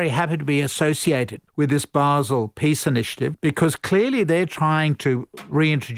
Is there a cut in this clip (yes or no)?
yes